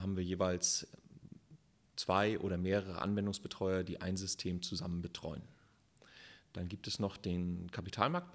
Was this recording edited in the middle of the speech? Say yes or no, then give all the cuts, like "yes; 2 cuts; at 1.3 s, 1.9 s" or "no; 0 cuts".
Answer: no; 0 cuts